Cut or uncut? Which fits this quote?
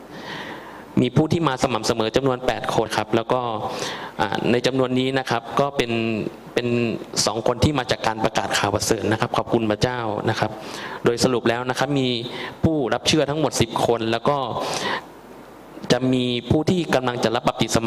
cut